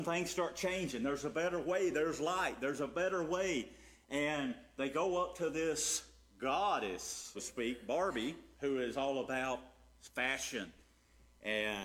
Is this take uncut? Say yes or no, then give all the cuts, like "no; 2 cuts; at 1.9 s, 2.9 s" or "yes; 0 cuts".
no; 2 cuts; at 7.3 s, 8.5 s